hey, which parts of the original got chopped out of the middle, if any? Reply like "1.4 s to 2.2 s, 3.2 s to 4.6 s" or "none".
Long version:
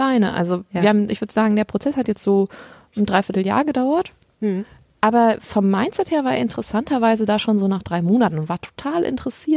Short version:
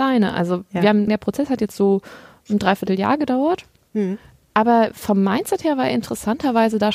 1.1 s to 1.5 s